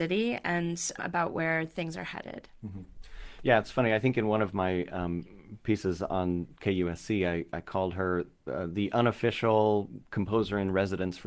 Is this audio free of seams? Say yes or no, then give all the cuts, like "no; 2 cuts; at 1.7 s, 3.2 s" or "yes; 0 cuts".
yes; 0 cuts